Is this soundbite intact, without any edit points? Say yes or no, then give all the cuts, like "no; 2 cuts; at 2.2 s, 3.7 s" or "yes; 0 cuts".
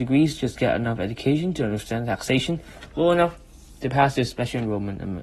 yes; 0 cuts